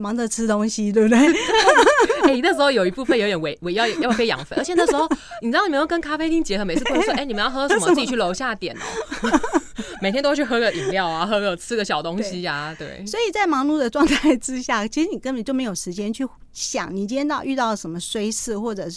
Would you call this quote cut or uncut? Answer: uncut